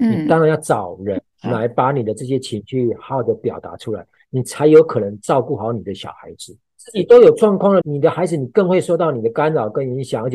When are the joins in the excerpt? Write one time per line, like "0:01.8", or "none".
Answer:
0:06.8
0:07.8

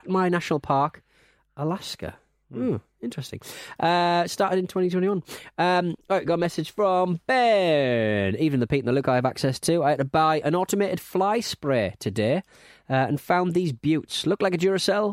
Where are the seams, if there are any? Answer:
0:10.4

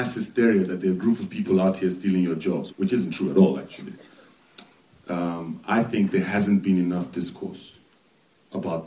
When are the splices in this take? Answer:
0:02.7

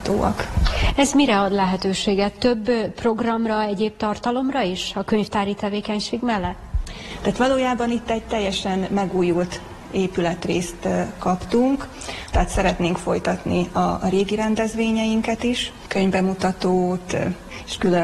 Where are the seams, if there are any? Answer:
0:12.3

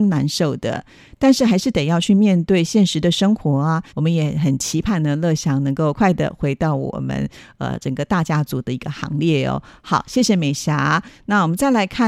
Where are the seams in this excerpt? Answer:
0:03.9
0:05.9

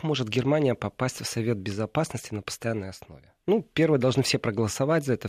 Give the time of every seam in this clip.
none

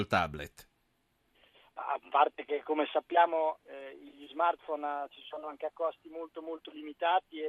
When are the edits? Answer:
none

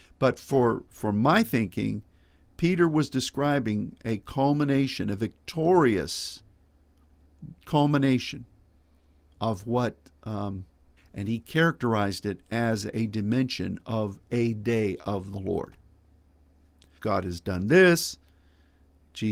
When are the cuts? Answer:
0:11.0
0:17.0

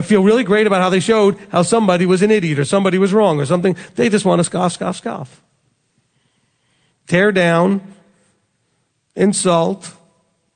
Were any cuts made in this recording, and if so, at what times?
none

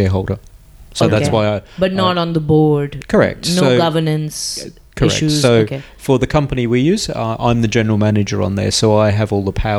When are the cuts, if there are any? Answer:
none

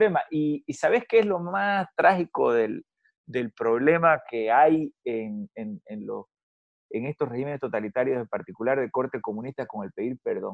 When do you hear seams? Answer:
none

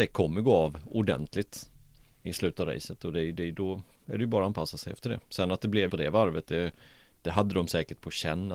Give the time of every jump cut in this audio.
0:02.2
0:05.9

